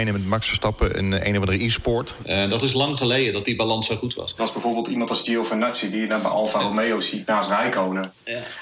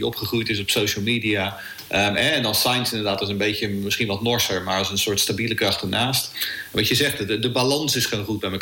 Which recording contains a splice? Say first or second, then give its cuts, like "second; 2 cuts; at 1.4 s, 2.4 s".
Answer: first; 2 cuts; at 2.2 s, 4.4 s